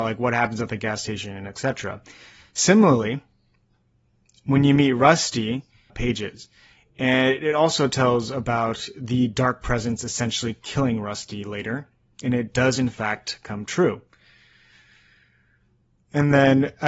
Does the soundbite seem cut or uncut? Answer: cut